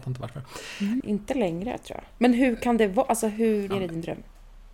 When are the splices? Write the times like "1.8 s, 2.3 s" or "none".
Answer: 1.0 s, 3.7 s

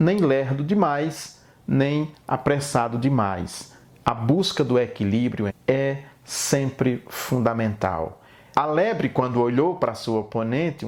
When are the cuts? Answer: 5.5 s, 8.5 s

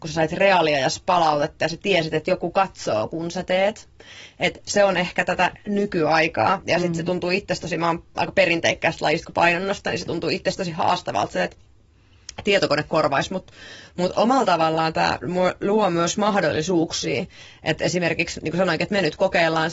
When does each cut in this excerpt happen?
none

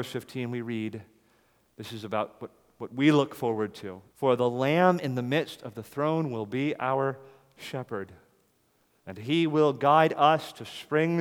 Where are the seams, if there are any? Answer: 4.1 s

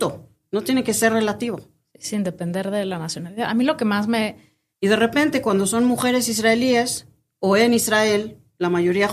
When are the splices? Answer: 4.7 s

